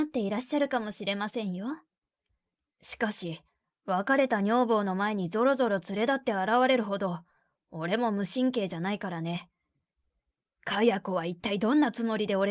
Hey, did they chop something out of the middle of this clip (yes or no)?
no